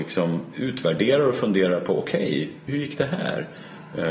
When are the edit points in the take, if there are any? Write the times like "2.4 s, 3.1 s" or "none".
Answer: 2.7 s